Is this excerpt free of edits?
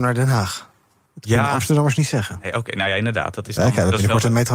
yes; 0 cuts

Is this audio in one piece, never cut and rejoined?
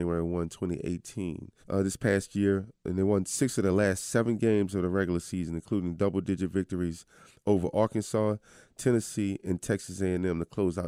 no; 1 cut; at 1.6 s

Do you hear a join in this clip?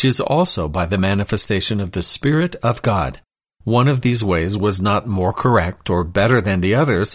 yes; 1 cut; at 3.5 s

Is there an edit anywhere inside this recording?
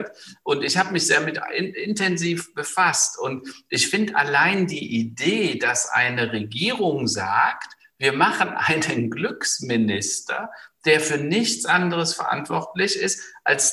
no; 0 cuts

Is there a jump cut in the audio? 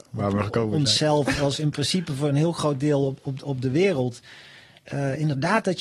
no; 0 cuts

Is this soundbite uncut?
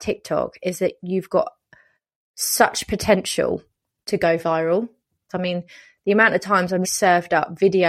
no; 2 cuts; at 5.3 s, 6.8 s

